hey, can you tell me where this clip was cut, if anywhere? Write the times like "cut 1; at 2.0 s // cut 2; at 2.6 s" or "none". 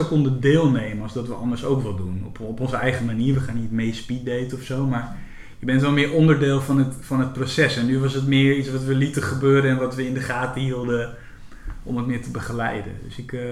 none